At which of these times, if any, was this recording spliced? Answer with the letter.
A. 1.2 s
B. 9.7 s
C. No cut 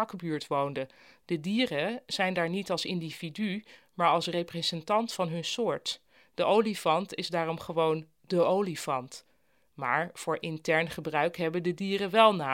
A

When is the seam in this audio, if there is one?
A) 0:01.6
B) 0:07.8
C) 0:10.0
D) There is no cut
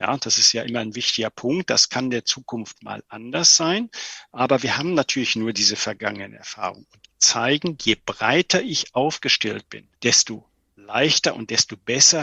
C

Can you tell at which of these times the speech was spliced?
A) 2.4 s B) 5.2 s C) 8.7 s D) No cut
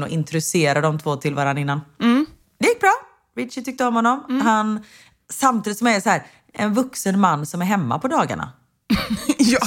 A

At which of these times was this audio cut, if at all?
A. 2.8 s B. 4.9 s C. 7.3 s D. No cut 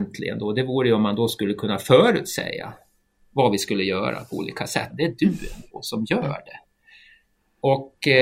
B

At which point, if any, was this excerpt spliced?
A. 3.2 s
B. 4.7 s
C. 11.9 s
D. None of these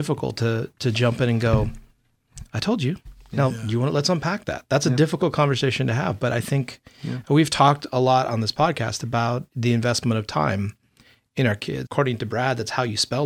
C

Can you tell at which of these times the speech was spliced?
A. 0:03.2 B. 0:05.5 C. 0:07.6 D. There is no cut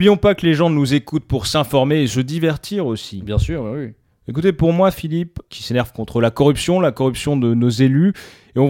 B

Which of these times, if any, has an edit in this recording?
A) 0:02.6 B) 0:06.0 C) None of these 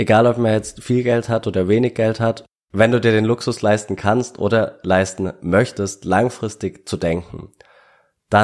A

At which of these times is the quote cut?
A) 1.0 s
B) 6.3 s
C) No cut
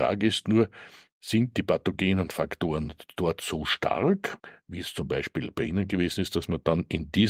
C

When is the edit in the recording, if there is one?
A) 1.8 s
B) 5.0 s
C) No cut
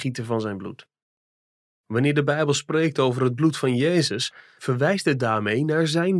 A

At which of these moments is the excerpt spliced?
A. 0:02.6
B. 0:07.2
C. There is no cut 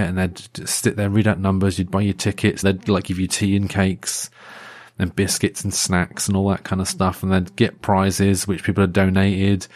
A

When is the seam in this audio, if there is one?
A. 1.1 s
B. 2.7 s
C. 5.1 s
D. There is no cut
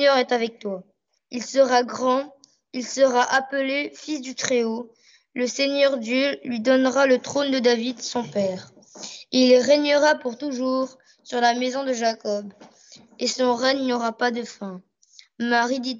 A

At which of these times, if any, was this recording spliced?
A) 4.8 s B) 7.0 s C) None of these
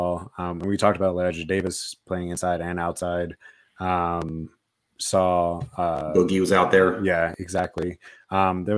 C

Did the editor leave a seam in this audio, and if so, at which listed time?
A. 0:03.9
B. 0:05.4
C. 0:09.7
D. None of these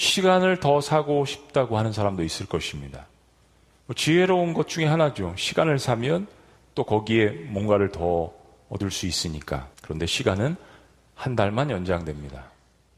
C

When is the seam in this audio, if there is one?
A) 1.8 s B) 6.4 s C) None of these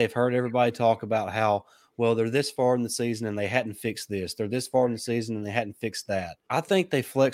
B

